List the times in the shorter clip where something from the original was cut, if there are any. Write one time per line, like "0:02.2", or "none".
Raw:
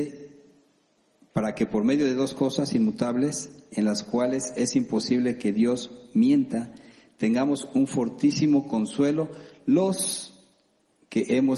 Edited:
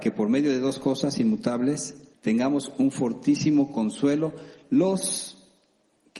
0:02.1